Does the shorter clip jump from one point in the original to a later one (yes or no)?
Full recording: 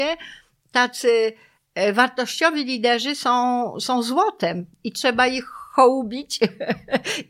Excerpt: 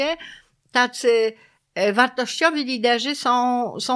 no